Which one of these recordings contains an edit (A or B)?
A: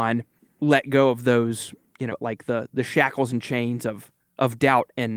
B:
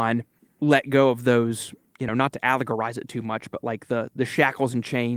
A